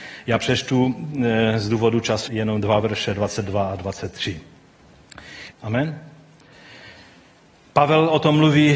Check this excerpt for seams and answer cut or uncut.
cut